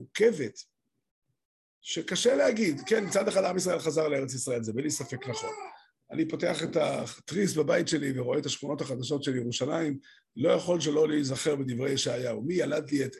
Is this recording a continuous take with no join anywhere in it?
no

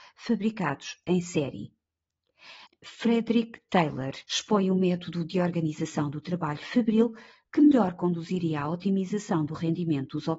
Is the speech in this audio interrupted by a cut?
yes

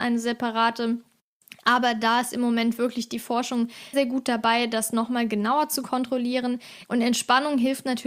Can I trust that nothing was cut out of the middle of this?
no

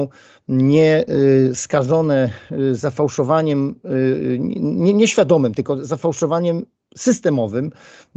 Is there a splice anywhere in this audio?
no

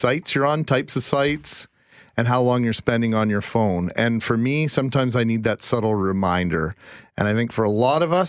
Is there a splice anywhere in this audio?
no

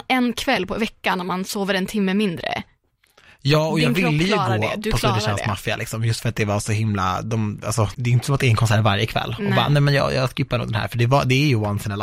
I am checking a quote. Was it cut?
yes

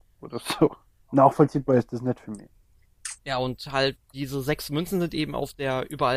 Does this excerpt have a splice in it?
yes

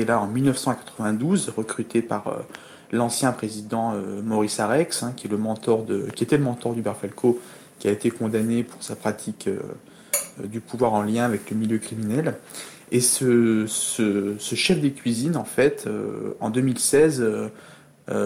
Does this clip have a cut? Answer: no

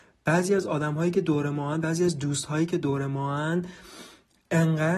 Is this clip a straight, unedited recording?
yes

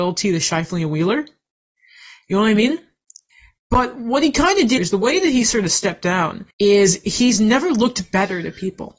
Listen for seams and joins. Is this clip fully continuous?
no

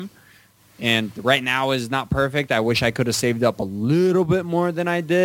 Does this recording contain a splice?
no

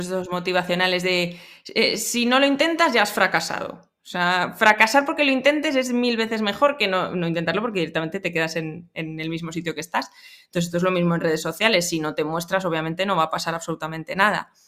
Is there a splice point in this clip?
no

